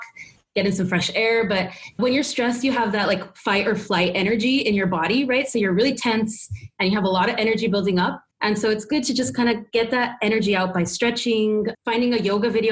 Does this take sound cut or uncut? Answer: cut